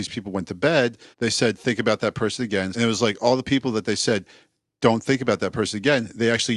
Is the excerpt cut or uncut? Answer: cut